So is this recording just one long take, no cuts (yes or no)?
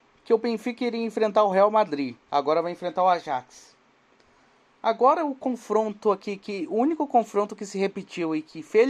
yes